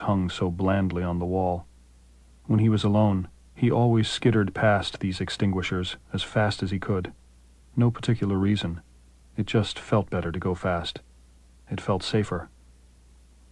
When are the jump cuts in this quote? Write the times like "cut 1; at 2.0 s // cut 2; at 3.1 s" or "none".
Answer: none